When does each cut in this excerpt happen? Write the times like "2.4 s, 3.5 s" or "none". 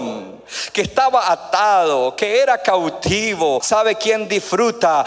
3.6 s